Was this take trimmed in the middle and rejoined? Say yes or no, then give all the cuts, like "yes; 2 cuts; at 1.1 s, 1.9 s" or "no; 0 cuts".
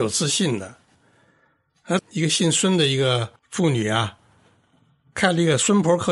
yes; 2 cuts; at 2.0 s, 3.4 s